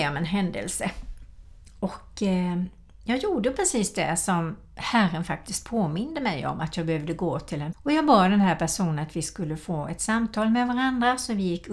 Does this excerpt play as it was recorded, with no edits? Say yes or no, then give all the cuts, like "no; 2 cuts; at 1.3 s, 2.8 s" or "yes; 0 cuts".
yes; 0 cuts